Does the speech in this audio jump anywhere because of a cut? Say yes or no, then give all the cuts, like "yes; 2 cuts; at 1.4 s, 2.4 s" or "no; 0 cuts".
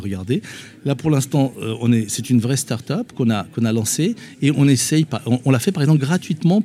no; 0 cuts